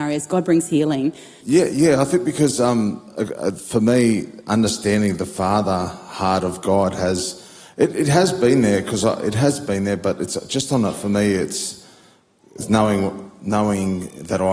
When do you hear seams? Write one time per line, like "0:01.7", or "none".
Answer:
0:01.4